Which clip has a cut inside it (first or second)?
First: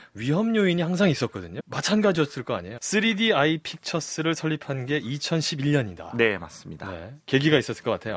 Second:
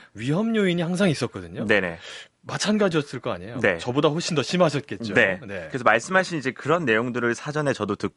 first